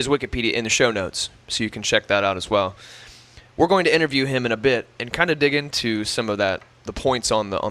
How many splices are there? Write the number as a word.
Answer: one